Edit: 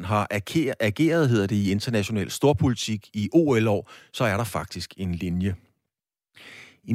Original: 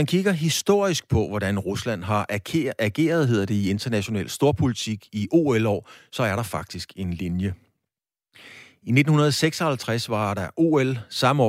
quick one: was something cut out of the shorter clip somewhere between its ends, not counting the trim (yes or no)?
no